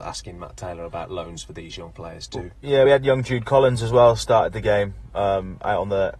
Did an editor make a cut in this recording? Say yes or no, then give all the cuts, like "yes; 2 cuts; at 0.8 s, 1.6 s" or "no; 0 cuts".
no; 0 cuts